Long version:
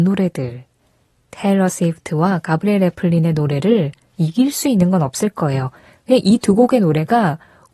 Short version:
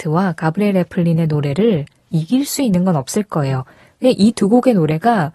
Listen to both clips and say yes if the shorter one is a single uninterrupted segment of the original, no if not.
yes